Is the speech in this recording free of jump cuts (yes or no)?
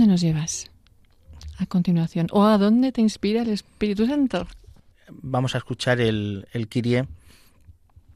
no